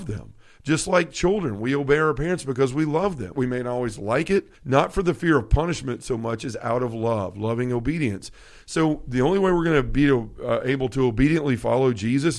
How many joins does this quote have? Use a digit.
2